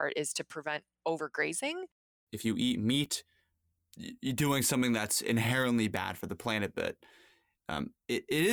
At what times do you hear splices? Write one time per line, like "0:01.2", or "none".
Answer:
0:02.3